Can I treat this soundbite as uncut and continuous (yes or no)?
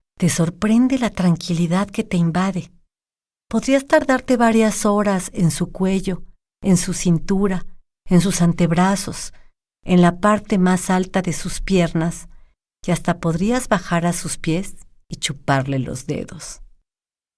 yes